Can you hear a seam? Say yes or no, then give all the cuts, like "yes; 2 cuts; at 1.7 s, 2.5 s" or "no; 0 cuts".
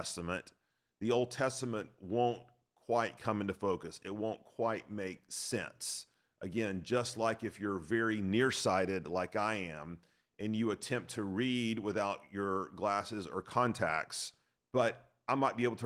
yes; 1 cut; at 14.6 s